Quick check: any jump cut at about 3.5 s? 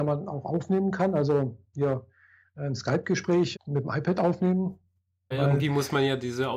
yes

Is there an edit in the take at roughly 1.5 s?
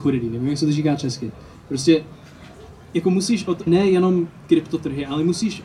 no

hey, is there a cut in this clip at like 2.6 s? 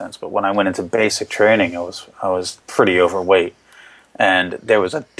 yes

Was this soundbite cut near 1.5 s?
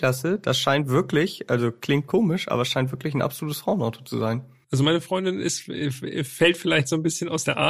no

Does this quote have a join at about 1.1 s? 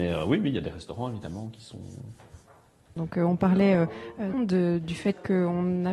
no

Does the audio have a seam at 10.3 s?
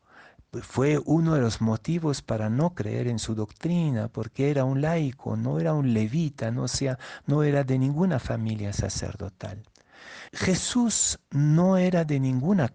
yes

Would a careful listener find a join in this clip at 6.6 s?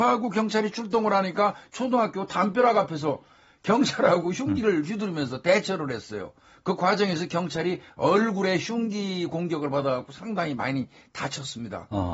no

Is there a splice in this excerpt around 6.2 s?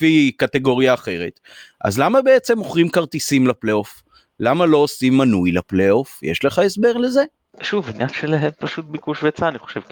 no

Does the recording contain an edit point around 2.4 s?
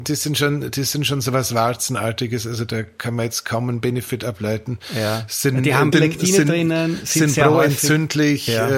no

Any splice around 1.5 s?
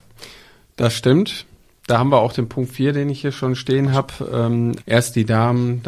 no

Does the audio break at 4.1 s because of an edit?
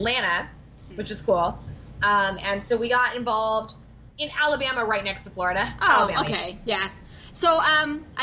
yes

